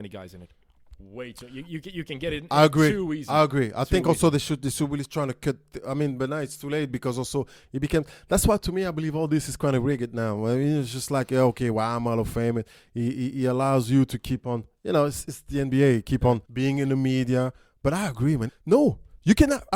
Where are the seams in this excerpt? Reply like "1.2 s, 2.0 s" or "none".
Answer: 16.4 s, 18.5 s

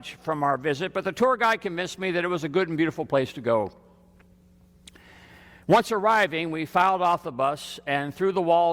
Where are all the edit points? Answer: none

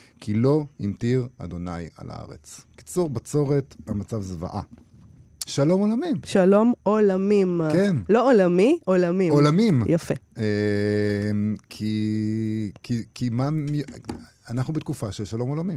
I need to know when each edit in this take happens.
5.5 s

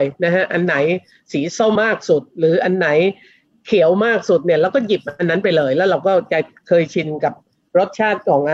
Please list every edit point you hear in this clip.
1.8 s

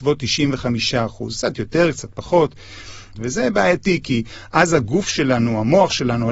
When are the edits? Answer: 3.1 s

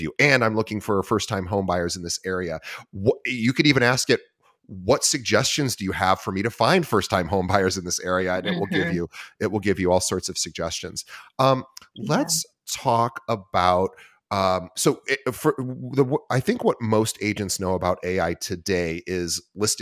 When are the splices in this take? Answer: none

